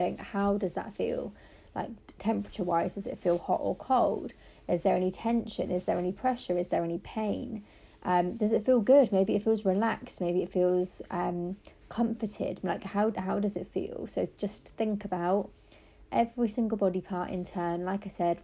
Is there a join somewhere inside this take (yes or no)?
no